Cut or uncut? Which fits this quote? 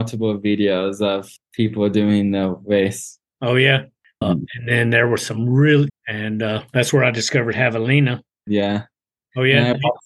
cut